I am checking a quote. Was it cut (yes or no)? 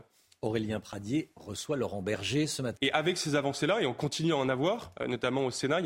yes